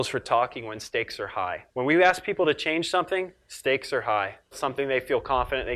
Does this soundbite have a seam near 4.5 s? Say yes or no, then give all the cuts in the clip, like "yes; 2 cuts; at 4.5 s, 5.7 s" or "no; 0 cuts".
yes; 2 cuts; at 1.7 s, 4.5 s